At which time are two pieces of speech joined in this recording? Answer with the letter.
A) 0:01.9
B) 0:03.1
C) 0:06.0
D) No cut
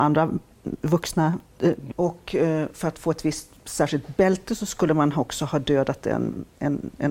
A